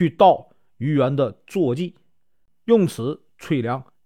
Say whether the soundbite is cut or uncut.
uncut